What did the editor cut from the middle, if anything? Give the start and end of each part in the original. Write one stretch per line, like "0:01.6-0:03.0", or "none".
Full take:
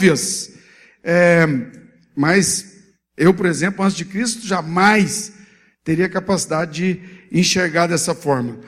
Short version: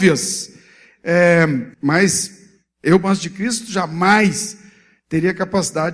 0:01.7-0:02.1
0:03.4-0:03.8